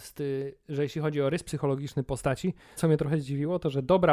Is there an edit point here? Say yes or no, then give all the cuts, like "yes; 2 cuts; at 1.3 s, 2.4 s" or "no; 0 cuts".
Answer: yes; 1 cut; at 2.8 s